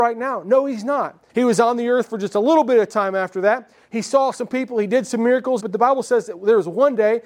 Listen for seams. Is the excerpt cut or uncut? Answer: cut